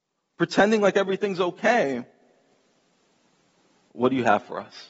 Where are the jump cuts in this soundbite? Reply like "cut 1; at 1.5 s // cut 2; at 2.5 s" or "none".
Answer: cut 1; at 3.9 s